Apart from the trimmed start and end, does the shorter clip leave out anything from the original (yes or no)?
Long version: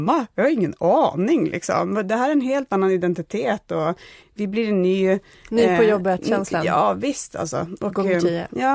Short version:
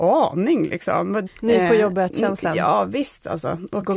yes